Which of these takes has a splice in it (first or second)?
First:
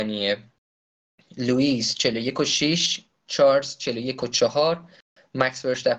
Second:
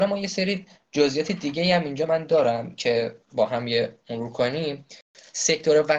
second